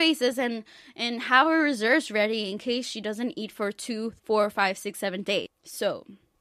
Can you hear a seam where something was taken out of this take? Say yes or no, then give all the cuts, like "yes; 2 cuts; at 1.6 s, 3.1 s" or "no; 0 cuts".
yes; 1 cut; at 4.2 s